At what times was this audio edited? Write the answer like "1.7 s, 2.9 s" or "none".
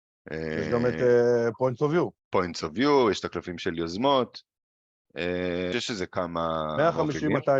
2.2 s, 5.7 s